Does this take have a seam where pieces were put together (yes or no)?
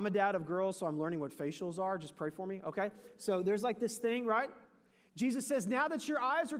no